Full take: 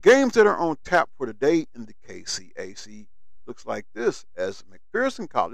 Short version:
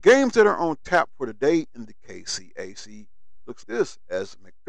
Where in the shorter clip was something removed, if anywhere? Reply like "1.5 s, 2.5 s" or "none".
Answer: 3.6 s